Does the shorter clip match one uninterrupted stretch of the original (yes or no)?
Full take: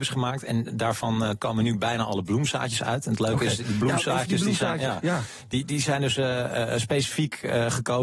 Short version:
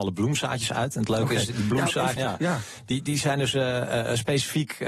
no